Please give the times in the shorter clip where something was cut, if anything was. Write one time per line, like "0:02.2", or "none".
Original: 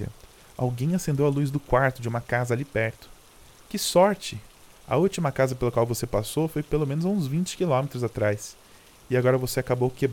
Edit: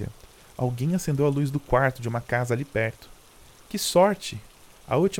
none

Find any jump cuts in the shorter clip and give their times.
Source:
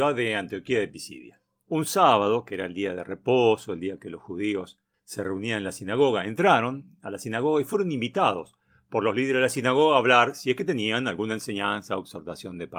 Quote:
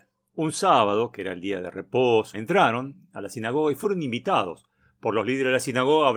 0:02.3

